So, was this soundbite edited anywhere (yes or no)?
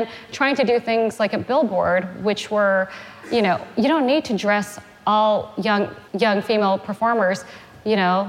yes